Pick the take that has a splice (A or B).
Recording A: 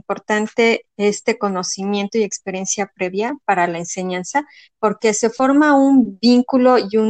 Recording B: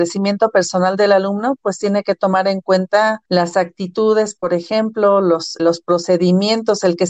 B